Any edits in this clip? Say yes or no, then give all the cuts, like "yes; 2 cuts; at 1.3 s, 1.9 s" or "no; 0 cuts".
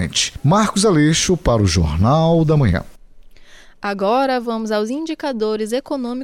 no; 0 cuts